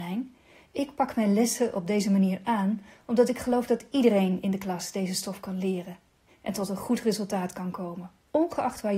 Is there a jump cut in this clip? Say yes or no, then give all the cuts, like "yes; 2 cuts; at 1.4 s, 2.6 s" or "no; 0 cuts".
no; 0 cuts